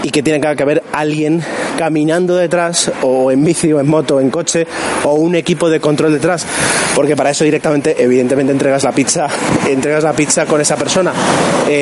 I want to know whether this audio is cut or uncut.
uncut